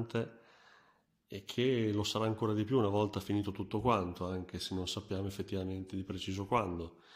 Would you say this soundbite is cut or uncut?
uncut